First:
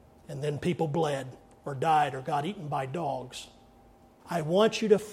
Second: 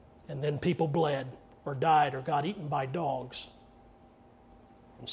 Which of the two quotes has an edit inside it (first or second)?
first